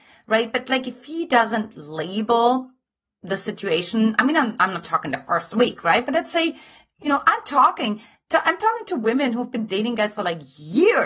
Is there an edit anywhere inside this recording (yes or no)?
no